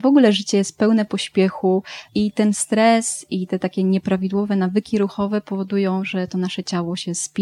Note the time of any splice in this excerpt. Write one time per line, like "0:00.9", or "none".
0:02.1